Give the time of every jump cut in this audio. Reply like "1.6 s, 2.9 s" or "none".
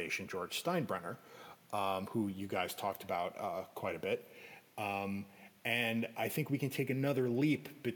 none